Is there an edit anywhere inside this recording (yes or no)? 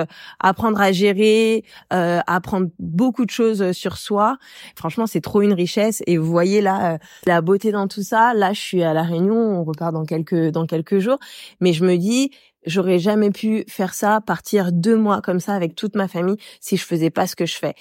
no